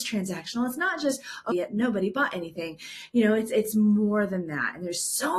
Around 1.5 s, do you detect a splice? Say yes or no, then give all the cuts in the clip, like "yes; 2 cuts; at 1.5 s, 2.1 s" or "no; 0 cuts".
yes; 1 cut; at 1.5 s